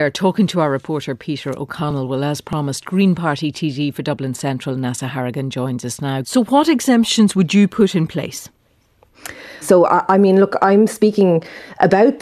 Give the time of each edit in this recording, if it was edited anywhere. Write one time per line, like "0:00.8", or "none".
0:06.2
0:09.6